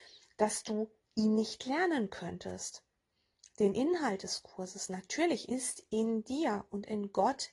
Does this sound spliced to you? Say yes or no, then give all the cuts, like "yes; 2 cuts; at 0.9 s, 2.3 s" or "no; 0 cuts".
yes; 1 cut; at 5.5 s